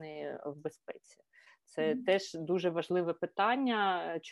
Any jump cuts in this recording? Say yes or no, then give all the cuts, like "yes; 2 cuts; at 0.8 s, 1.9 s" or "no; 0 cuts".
no; 0 cuts